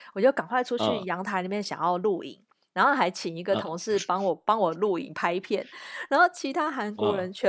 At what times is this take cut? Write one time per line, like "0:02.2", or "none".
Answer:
none